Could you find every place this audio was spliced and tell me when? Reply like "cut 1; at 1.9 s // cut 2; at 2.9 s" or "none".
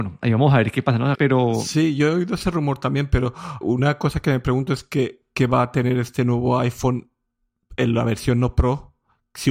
cut 1; at 1.1 s // cut 2; at 3.6 s